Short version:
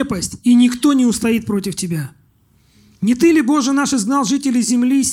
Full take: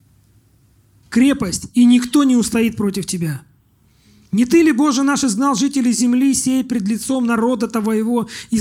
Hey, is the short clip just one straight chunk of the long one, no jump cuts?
yes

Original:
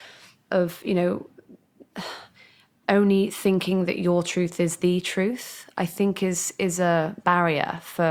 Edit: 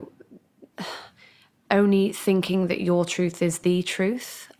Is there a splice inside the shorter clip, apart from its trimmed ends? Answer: no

